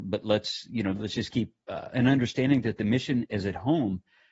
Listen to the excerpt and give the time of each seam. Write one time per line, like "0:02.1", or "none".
0:01.9